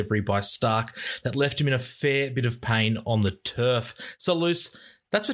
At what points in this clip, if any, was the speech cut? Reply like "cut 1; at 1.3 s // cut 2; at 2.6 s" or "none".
none